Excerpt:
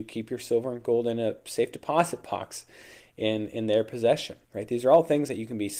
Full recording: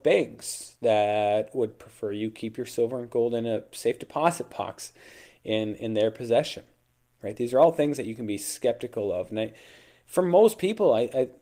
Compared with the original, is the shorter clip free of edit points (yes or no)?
no